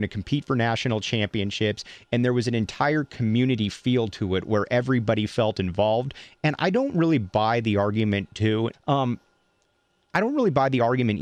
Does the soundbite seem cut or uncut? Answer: cut